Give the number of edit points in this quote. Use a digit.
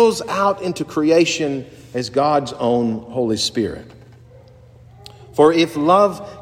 0